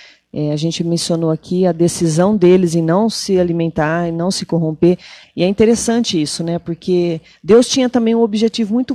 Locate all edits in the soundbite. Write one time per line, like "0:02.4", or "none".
0:05.2